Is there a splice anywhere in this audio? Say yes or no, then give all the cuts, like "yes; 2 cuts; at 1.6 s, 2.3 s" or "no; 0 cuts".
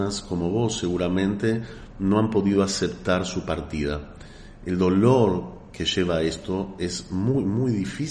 no; 0 cuts